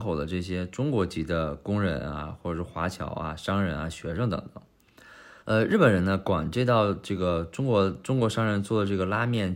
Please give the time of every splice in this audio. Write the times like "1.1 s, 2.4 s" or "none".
5.4 s